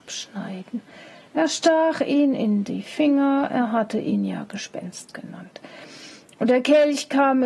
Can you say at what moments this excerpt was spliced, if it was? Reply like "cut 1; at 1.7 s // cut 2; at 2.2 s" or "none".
none